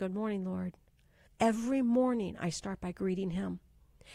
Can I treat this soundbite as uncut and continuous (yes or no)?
no